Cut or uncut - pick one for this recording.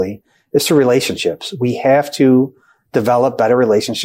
uncut